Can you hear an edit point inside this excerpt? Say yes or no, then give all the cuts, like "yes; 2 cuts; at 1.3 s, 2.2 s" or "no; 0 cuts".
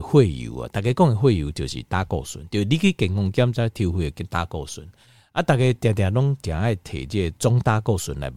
no; 0 cuts